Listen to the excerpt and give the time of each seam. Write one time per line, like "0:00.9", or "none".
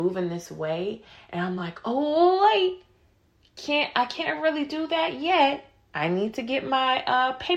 none